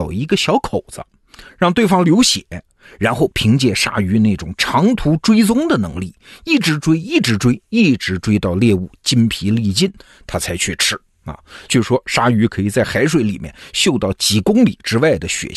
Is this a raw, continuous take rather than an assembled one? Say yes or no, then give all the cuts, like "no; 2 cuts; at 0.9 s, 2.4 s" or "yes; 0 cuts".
no; 1 cut; at 11.7 s